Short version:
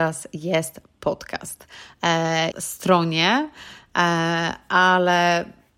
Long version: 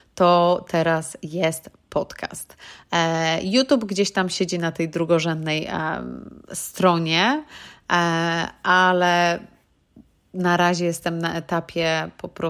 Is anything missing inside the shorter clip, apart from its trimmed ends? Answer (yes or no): yes